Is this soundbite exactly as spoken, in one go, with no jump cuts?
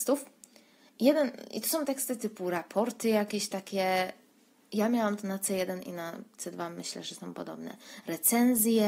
yes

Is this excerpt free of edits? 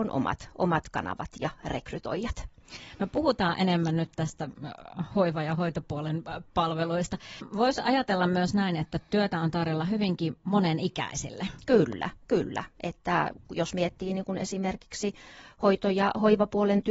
yes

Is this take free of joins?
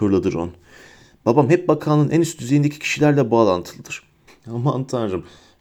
no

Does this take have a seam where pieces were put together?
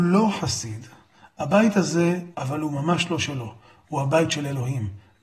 yes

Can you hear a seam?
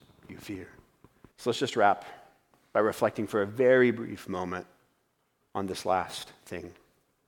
yes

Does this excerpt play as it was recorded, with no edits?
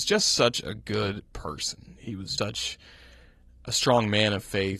no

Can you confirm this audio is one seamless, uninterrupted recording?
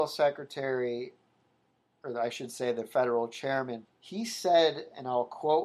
no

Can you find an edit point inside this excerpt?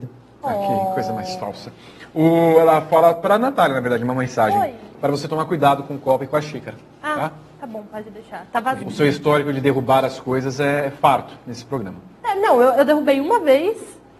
yes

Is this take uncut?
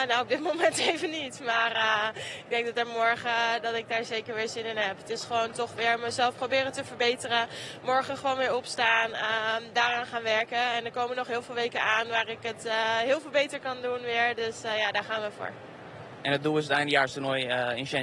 yes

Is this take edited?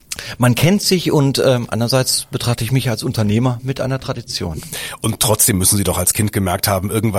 no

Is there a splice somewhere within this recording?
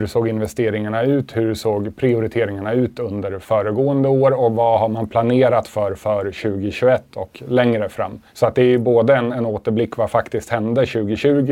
yes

